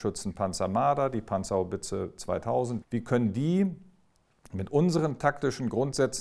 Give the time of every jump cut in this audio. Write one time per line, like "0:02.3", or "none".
0:02.8